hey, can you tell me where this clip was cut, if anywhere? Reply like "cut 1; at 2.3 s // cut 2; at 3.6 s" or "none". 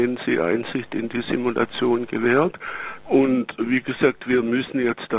cut 1; at 3.0 s